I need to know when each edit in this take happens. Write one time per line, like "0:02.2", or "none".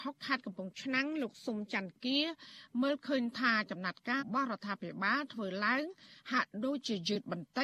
0:04.2